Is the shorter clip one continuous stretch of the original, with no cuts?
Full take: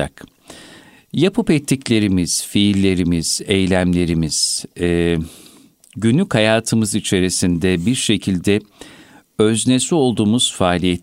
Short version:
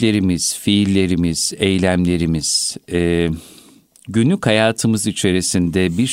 yes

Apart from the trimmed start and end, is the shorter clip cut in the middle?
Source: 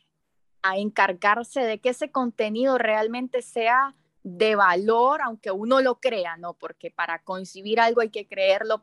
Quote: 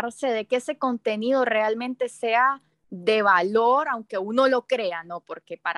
no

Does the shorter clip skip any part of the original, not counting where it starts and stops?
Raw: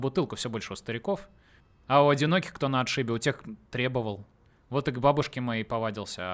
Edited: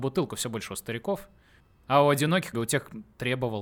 yes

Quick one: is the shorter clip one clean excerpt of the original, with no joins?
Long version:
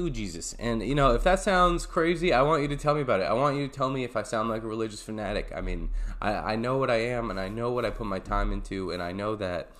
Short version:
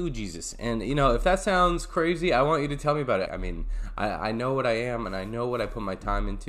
no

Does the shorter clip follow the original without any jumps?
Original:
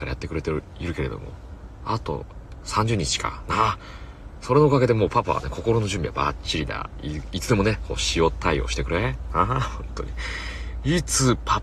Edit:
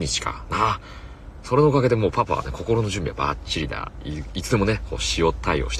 yes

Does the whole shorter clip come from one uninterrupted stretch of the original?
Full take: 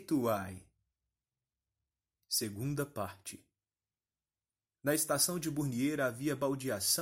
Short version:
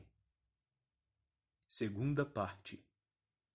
yes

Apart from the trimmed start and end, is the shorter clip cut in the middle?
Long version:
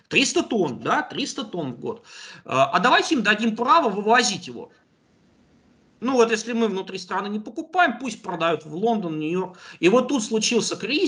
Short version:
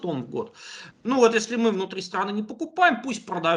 yes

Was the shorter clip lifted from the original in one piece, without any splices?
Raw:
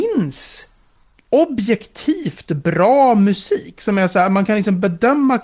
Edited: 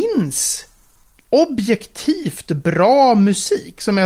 yes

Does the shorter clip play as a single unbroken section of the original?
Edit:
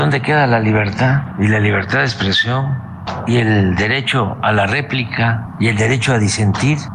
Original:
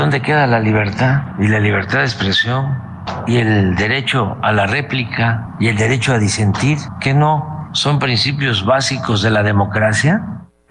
yes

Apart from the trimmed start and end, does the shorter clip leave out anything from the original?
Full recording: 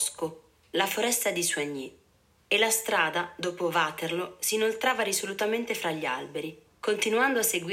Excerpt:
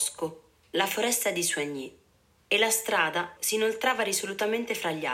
yes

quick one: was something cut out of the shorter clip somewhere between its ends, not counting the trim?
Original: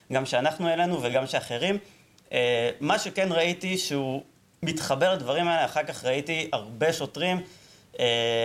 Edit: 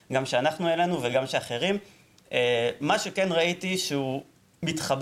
no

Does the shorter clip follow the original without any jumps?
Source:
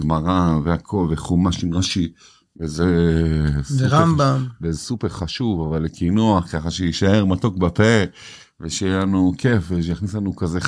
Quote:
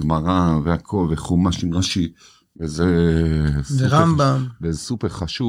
yes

